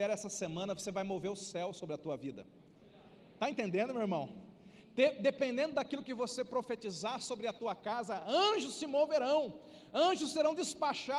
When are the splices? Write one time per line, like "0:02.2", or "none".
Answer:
none